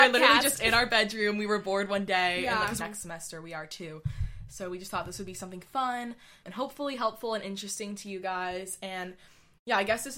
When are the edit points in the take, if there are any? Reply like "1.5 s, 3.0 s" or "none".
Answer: 2.8 s, 6.4 s